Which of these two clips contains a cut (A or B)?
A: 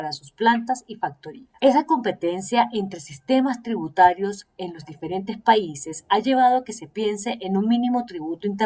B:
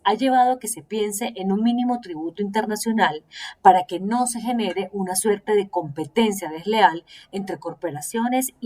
A